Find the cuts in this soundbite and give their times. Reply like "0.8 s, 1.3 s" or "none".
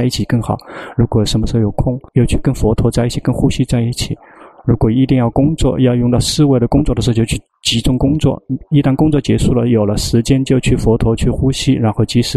2.1 s